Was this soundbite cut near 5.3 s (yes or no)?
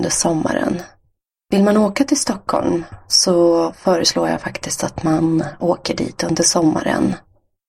no